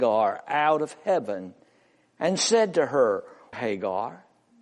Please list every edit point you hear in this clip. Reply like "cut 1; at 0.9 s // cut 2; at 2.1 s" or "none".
cut 1; at 3.5 s